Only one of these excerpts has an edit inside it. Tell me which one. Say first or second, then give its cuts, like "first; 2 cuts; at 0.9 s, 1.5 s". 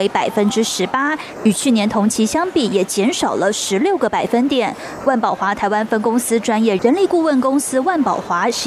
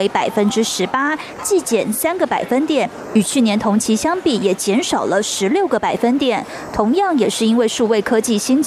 first; 3 cuts; at 1.4 s, 5.0 s, 6.8 s